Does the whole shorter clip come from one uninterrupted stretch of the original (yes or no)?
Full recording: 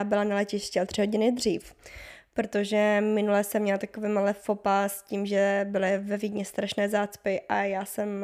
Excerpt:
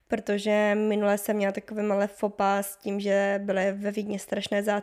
yes